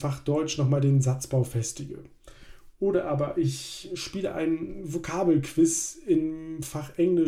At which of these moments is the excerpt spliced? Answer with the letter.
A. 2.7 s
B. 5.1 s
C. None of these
C